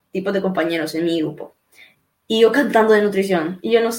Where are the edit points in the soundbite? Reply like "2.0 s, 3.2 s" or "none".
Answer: none